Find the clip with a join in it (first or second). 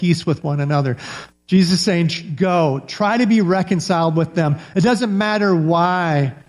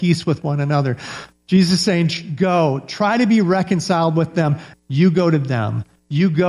second